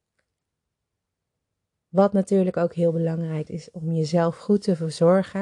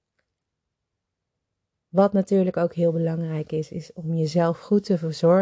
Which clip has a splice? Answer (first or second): first